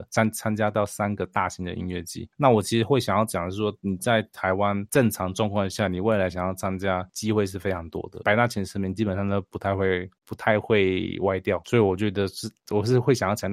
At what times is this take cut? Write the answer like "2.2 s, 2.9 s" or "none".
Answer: 8.2 s